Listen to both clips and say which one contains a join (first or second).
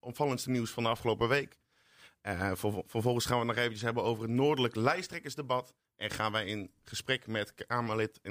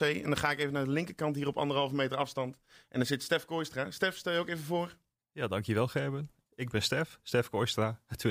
second